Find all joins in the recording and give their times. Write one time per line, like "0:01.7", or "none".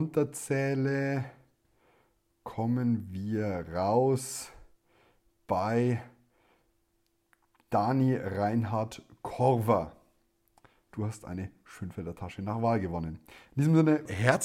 0:10.9